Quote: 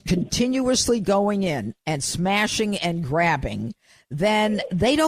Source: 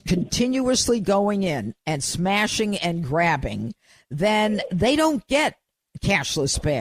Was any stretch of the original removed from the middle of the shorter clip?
no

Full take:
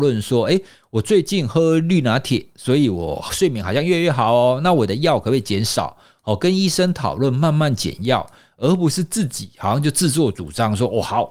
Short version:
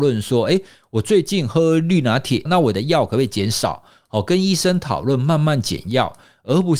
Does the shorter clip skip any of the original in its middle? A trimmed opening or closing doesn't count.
yes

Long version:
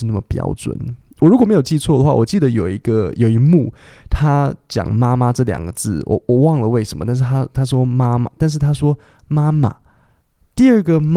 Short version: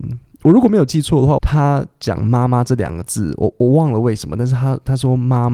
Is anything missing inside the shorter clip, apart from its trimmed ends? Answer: yes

